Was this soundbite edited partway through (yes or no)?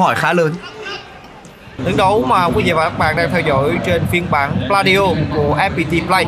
yes